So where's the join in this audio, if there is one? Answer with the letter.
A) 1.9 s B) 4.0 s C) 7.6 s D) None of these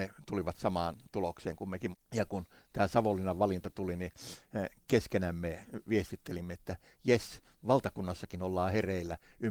A